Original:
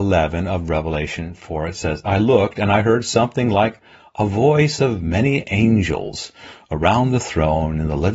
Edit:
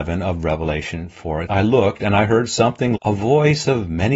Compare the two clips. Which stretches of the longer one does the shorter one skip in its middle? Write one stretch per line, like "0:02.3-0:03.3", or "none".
0:01.7-0:02.0
0:03.5-0:04.1

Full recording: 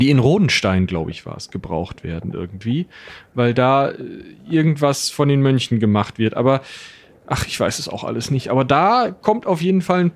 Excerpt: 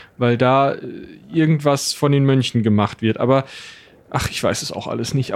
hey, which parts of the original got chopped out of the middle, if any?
none

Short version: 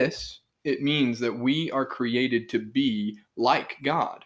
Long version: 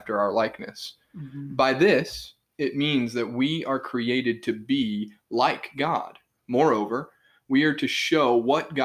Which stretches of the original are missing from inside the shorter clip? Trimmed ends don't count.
none

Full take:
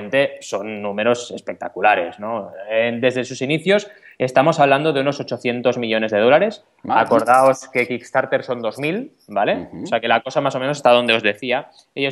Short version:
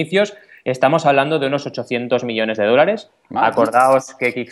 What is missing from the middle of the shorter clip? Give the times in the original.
none

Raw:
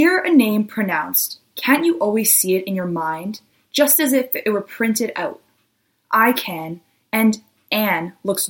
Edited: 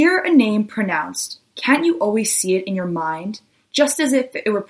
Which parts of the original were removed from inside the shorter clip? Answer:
none

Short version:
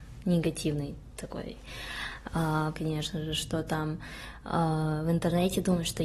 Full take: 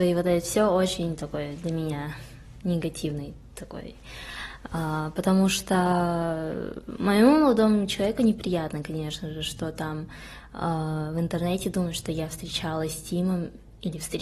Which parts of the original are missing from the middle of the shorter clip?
0:05.1-0:08.8

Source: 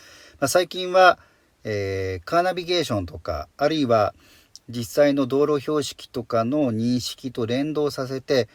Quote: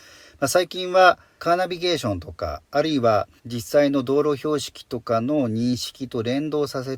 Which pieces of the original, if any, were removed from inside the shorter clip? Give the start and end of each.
0:01.4-0:02.2
0:04.2-0:04.6

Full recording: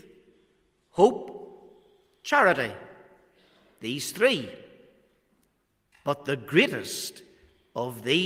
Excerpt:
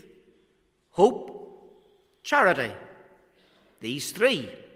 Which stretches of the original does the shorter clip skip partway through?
none

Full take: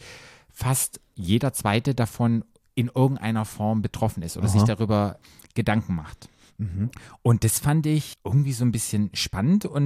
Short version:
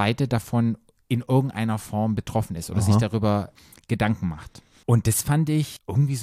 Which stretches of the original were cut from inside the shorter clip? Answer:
0:06.5-0:07.2

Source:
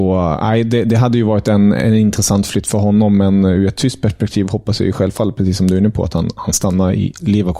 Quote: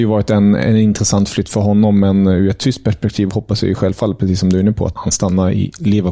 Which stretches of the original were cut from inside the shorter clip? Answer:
0:06.1-0:06.3

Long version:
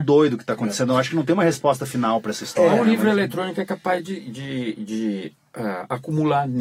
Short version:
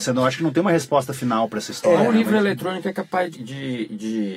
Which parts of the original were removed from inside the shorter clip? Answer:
0:04.1-0:04.2

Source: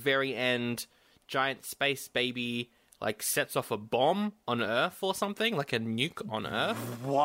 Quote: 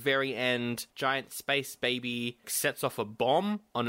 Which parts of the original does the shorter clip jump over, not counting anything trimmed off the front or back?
0:00.9-0:01.2
0:02.8-0:03.2

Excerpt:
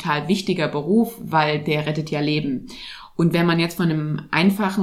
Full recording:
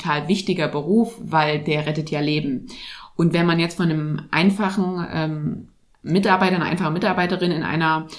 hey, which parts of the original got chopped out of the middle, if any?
none

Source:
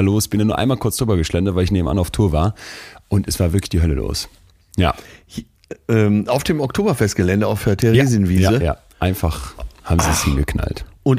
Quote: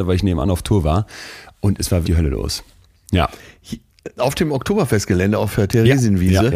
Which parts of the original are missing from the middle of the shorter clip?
0:03.5-0:03.7
0:05.8-0:06.2

